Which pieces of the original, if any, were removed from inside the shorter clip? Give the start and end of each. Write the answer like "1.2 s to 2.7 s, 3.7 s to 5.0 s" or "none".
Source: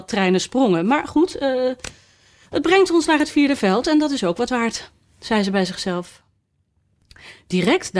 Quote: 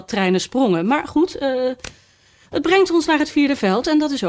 none